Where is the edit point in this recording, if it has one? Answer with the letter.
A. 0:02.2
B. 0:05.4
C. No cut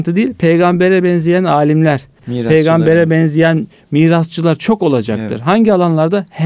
A